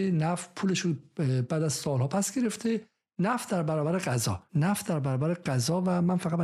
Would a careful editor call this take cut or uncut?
cut